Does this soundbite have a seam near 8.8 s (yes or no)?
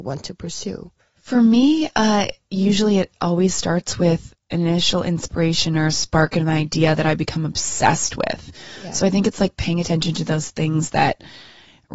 no